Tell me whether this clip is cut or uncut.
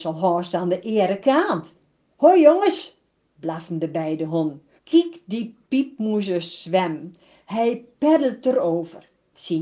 cut